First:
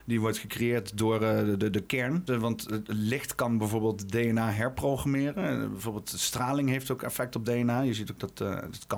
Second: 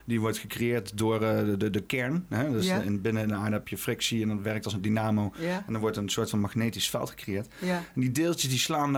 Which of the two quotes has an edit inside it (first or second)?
first